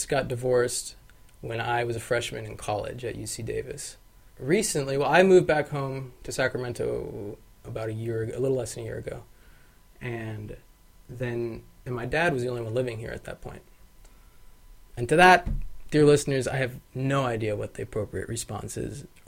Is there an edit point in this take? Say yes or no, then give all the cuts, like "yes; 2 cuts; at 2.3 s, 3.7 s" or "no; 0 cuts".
yes; 2 cuts; at 4.3 s, 14.9 s